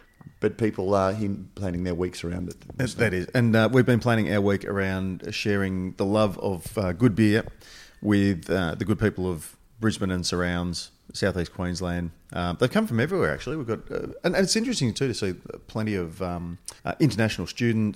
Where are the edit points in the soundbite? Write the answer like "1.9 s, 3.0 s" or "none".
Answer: 16.8 s